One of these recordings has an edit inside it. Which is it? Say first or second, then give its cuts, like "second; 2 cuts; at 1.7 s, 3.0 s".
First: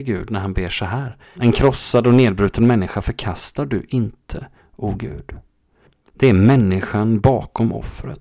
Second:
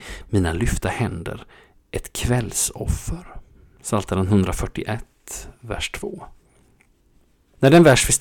first; 1 cut; at 1.3 s